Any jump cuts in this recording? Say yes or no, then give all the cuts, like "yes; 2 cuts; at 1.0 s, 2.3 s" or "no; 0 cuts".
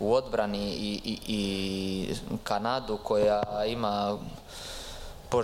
yes; 1 cut; at 1.2 s